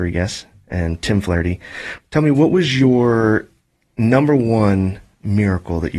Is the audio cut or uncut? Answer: cut